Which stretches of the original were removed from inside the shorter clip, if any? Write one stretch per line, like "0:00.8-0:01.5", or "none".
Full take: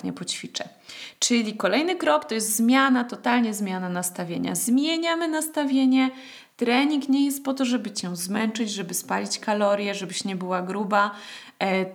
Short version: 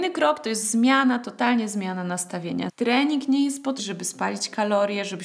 0:04.5-0:06.5
0:07.6-0:08.7